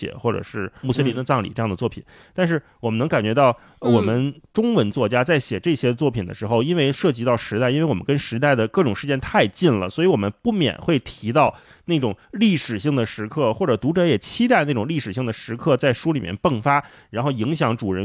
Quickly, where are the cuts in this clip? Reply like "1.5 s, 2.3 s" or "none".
none